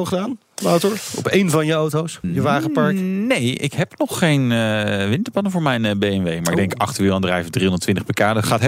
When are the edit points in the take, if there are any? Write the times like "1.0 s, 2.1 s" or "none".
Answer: none